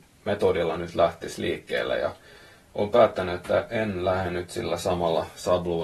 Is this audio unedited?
yes; 0 cuts

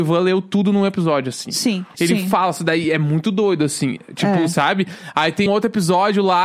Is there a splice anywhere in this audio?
yes; 2 cuts; at 1.9 s, 5.5 s

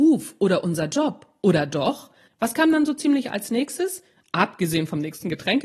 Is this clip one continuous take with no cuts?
no; 1 cut; at 2.3 s

